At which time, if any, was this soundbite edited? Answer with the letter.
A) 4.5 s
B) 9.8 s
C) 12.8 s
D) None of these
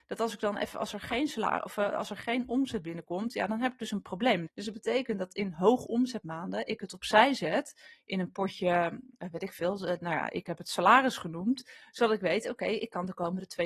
A